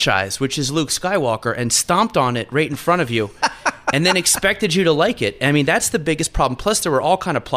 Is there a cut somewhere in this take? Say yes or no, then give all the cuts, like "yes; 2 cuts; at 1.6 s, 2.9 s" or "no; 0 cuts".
no; 0 cuts